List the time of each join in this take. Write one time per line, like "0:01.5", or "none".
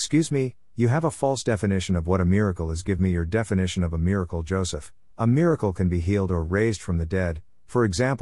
none